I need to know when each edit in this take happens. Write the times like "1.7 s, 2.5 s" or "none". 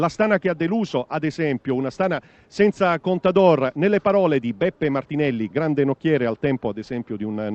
5.5 s